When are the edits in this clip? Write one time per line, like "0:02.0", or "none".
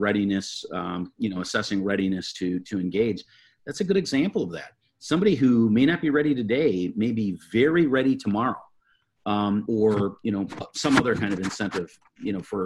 0:09.7

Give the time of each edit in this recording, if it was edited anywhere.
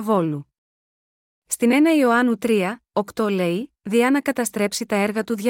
0:03.8

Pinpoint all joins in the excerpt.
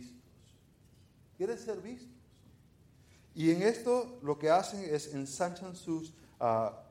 none

